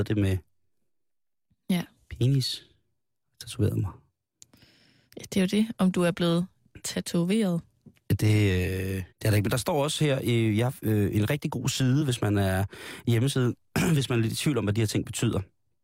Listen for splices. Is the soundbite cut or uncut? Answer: cut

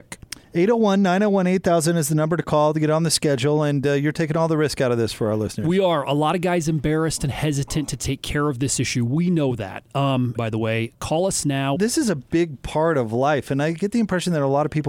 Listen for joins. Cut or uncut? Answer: cut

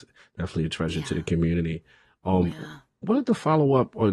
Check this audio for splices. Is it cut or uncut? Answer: uncut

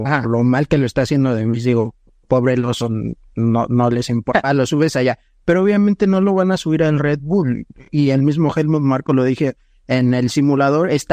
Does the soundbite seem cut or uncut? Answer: uncut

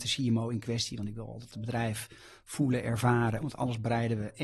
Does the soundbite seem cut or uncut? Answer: cut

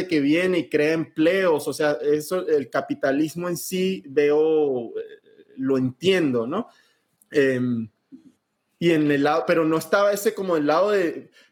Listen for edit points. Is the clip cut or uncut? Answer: cut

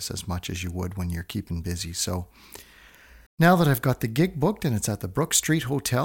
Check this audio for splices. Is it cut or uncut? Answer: cut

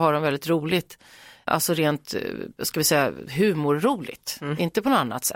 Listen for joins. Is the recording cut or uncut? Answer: uncut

